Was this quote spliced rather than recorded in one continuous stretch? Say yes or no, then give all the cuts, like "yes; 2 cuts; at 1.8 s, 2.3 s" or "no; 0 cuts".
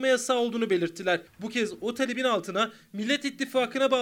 yes; 1 cut; at 1.3 s